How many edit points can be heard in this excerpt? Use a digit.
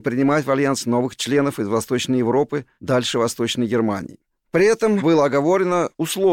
0